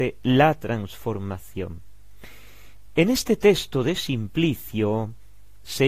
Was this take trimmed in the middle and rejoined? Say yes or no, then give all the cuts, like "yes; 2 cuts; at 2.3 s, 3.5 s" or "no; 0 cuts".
no; 0 cuts